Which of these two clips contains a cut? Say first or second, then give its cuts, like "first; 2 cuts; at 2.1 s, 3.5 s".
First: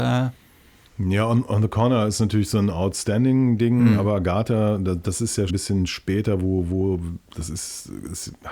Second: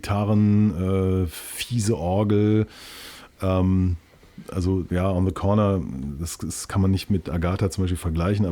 first; 1 cut; at 5.5 s